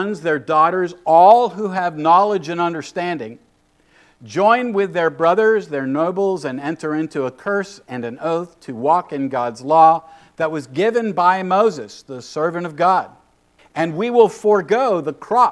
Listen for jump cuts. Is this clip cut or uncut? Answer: cut